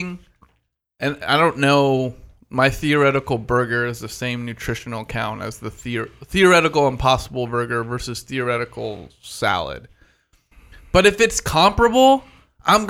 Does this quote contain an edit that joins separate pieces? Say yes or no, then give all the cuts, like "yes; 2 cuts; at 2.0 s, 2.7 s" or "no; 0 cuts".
no; 0 cuts